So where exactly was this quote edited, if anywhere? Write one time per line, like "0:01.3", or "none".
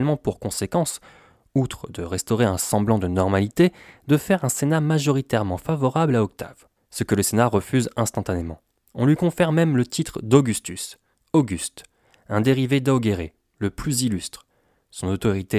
0:06.8